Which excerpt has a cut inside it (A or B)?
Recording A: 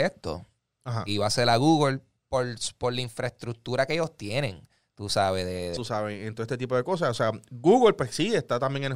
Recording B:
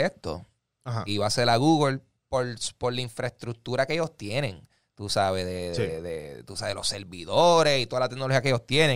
A